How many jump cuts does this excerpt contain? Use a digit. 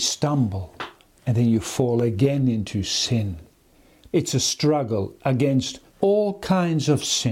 2